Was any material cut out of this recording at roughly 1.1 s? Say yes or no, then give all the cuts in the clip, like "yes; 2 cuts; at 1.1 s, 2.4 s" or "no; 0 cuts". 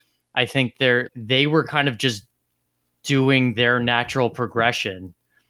yes; 1 cut; at 1.1 s